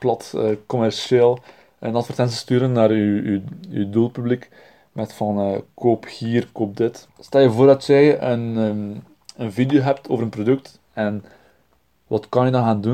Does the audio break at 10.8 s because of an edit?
yes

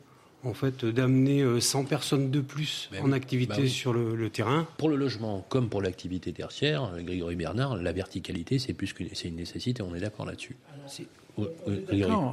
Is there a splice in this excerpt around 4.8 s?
yes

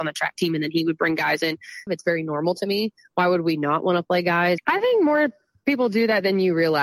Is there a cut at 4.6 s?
yes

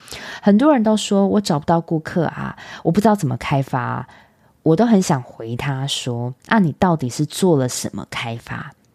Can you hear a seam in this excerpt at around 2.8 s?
no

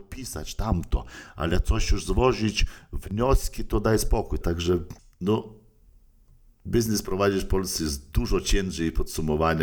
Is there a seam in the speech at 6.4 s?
no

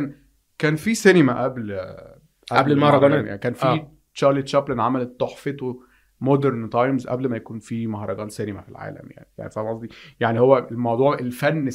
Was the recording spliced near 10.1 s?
no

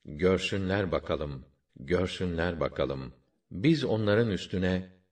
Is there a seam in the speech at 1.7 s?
yes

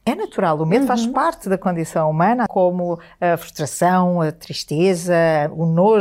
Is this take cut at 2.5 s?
yes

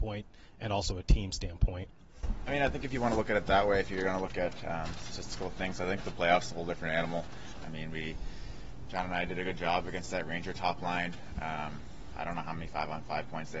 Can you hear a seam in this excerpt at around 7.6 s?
yes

